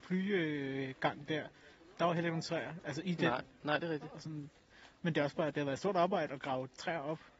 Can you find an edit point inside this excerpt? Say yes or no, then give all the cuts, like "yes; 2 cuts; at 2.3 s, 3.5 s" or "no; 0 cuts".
no; 0 cuts